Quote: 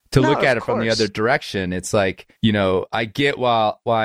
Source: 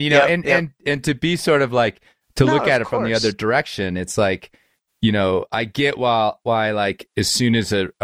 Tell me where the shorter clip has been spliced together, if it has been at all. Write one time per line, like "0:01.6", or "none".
0:02.4